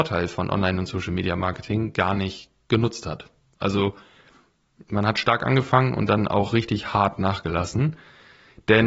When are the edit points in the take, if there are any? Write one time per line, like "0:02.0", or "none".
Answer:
none